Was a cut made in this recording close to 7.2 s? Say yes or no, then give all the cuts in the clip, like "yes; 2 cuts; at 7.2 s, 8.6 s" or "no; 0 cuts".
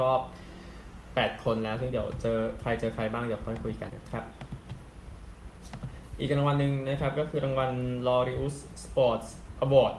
no; 1 cut; at 3.9 s